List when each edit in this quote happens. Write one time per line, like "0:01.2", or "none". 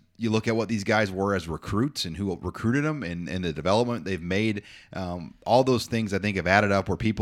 none